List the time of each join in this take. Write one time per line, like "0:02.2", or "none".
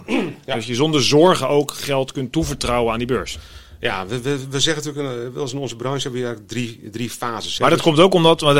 0:07.6